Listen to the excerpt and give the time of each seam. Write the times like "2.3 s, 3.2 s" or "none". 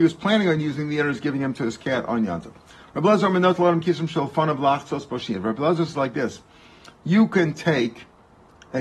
none